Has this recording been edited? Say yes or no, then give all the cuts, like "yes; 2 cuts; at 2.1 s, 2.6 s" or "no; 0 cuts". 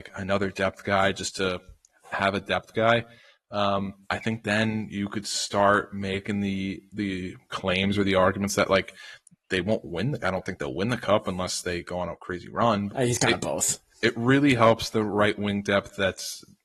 yes; 2 cuts; at 4.0 s, 12.9 s